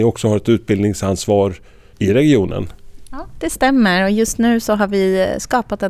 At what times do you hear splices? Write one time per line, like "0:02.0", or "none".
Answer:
none